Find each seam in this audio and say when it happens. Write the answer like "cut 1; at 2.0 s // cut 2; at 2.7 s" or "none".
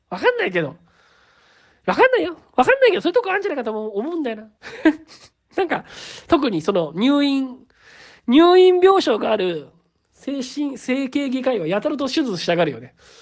cut 1; at 4.6 s